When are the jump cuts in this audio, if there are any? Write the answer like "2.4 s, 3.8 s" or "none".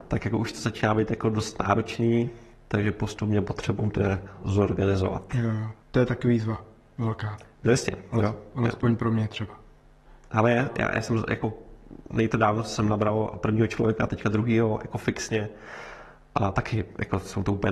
5.8 s